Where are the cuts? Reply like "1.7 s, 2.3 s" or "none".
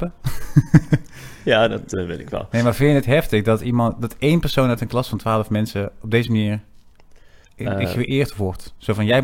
3.0 s, 7.4 s